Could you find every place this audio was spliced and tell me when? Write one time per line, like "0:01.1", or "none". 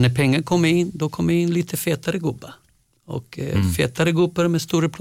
none